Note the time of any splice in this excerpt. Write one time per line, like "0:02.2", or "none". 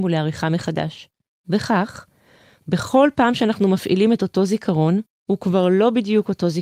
0:01.3
0:05.2